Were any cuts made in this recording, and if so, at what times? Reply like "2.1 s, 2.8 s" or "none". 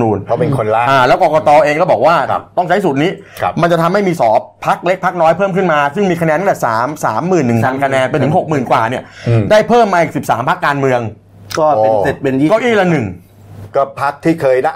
4.2 s